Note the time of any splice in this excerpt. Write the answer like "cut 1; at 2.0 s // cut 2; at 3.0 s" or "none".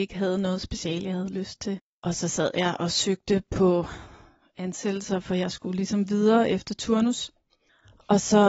none